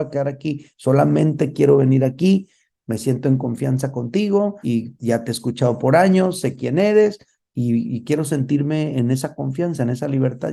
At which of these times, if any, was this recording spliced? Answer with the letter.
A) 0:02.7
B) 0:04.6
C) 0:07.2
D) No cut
B